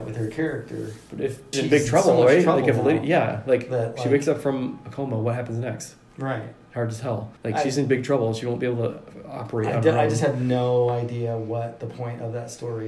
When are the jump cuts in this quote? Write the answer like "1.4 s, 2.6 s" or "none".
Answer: 1.5 s, 7.4 s